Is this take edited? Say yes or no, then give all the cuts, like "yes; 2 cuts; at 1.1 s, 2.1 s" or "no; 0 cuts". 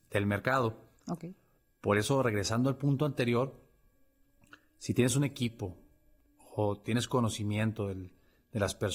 yes; 1 cut; at 1.0 s